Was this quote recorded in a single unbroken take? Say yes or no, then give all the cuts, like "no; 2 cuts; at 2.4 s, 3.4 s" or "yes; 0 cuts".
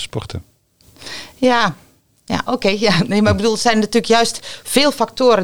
no; 1 cut; at 2.5 s